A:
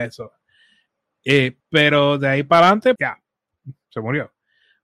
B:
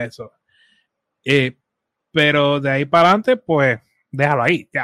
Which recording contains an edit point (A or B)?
A